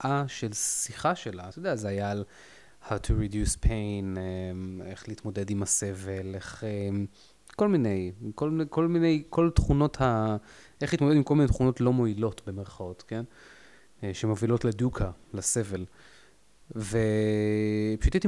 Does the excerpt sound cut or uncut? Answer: uncut